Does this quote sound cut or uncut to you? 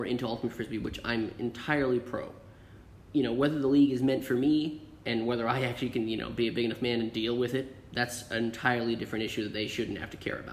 uncut